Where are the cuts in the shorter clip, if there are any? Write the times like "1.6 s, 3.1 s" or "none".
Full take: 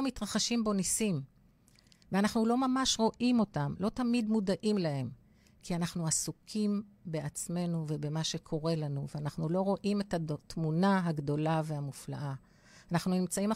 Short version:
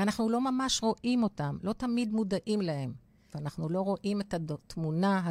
3.3 s